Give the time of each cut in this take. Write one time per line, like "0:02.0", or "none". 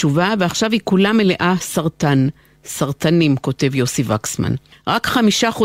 none